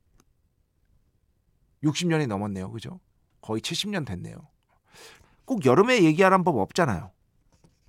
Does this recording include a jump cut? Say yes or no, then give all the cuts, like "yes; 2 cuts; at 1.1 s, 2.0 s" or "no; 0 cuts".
yes; 1 cut; at 5.2 s